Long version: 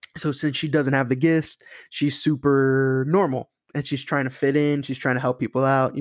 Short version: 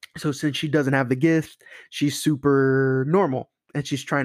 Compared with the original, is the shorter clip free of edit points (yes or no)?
yes